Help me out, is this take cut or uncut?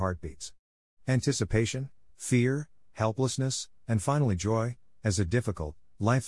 cut